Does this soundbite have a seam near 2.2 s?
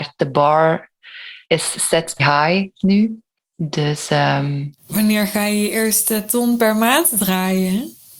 yes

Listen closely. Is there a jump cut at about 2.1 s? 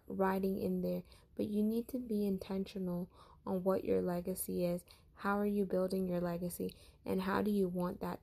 yes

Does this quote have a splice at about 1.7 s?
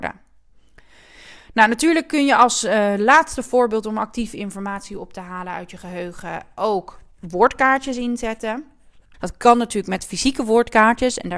no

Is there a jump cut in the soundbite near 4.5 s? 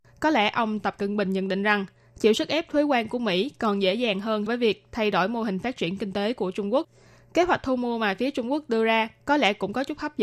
yes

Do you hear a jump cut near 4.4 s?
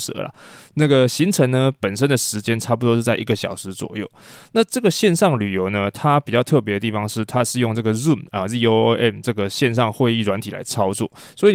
no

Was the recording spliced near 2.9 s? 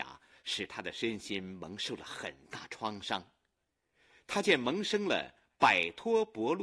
no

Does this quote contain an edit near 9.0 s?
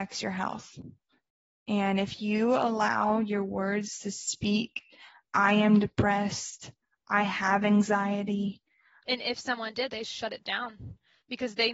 yes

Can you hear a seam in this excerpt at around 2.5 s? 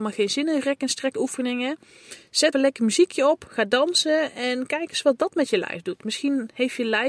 yes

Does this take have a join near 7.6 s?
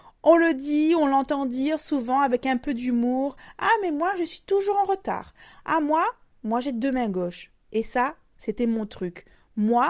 no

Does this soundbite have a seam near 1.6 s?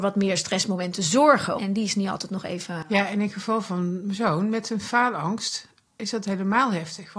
yes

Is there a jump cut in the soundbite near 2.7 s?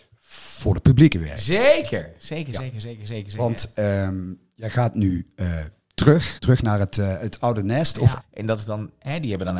no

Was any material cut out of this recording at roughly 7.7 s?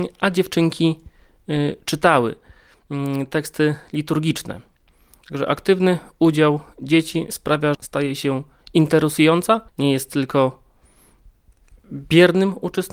yes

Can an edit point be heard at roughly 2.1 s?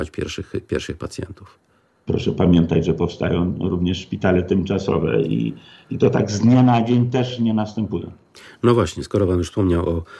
yes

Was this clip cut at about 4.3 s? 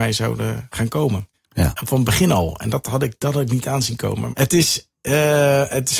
yes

